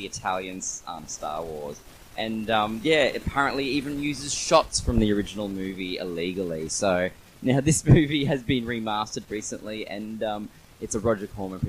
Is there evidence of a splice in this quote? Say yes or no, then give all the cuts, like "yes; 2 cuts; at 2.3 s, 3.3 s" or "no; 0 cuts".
no; 0 cuts